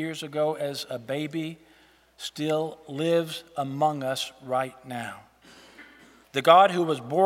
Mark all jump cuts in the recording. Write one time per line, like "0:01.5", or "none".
0:06.2